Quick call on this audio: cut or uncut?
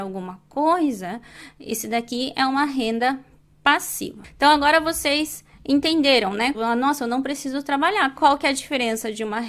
cut